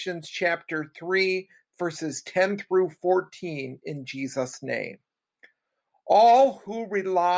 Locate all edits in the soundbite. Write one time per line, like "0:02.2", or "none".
none